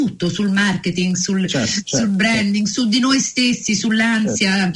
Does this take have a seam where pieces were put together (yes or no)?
no